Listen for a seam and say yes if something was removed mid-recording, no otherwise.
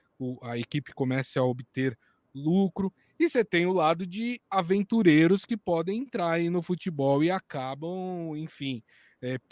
no